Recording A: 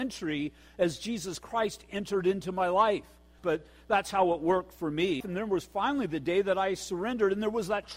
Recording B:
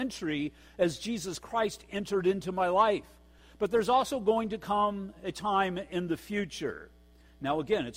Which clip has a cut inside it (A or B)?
A